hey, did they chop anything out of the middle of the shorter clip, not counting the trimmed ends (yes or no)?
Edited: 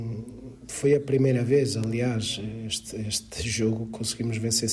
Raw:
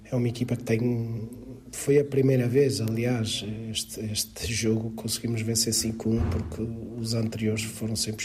no